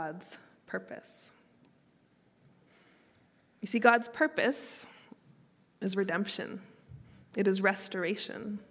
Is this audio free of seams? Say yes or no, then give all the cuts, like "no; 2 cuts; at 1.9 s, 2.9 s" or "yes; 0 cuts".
yes; 0 cuts